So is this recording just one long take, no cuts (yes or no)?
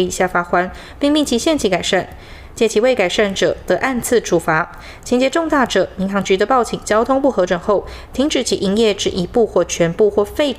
yes